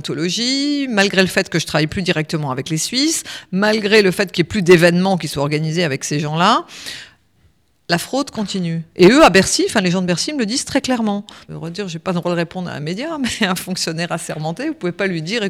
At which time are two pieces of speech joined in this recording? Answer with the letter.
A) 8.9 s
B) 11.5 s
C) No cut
B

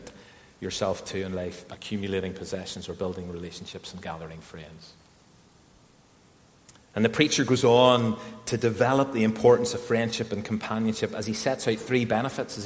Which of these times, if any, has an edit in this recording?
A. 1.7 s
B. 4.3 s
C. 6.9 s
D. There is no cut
A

